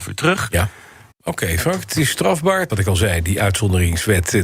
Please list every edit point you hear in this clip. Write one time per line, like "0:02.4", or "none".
0:01.1
0:02.7

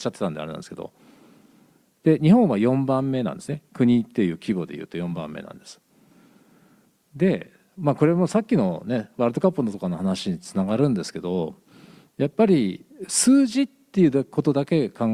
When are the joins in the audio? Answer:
none

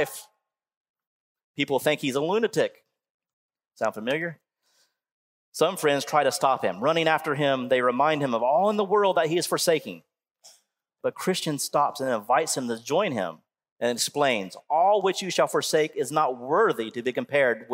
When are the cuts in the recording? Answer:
none

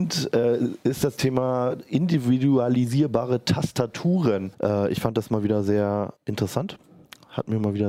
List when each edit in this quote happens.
0:04.5
0:06.2

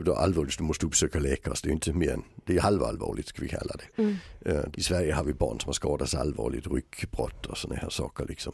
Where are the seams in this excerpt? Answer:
0:04.7

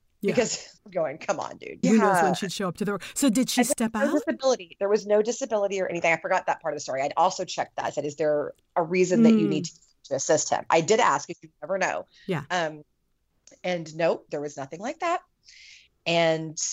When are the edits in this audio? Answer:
0:01.8

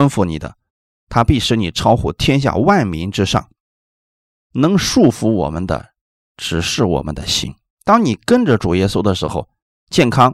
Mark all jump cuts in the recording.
0:04.3
0:07.7

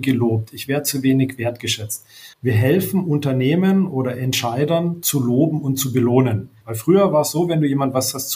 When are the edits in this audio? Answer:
0:02.3
0:06.6

